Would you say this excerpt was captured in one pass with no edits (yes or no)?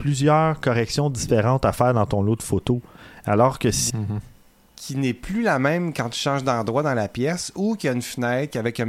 no